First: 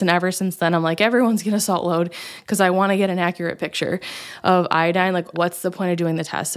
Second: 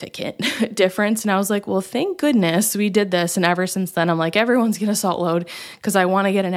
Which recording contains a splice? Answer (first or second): first